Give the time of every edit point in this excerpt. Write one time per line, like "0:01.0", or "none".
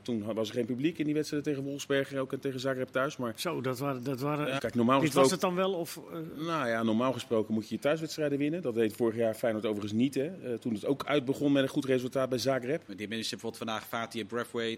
0:04.6
0:12.9